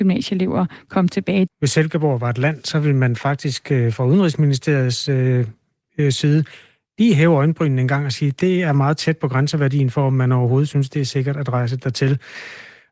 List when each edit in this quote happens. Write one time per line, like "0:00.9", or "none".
0:01.5